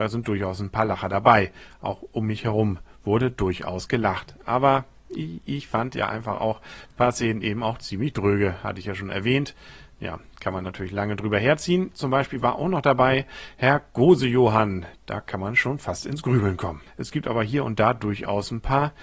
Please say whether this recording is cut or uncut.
cut